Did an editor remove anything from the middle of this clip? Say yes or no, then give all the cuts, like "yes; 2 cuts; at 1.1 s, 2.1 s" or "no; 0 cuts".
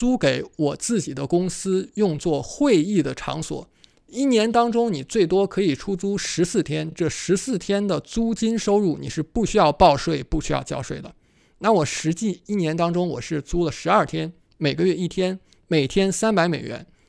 no; 0 cuts